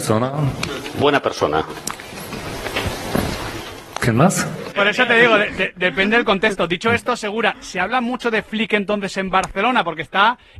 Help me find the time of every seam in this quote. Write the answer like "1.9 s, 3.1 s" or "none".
4.7 s